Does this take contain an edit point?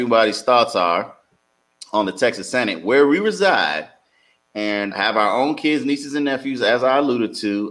yes; 1 cut; at 4.9 s

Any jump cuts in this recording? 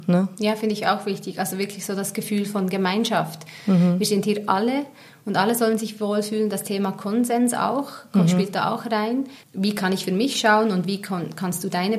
yes; 1 cut; at 9.4 s

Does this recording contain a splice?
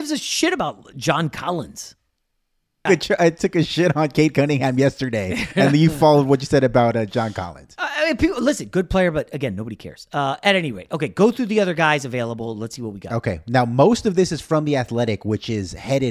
yes; 1 cut; at 2.9 s

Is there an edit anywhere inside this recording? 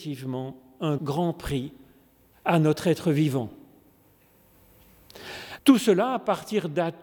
yes; 2 cuts; at 1.0 s, 5.6 s

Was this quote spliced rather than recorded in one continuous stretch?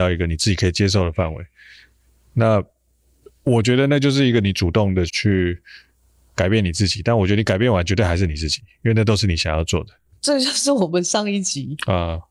yes; 2 cuts; at 5.1 s, 10.2 s

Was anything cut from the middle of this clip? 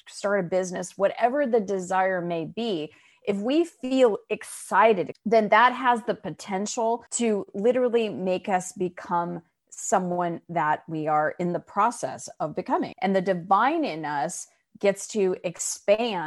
yes; 3 cuts; at 5.1 s, 7.1 s, 12.9 s

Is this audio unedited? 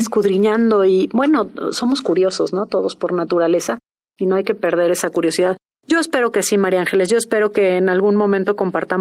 yes; 0 cuts

